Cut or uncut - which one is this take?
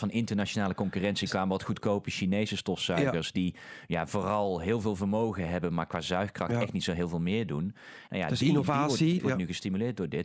cut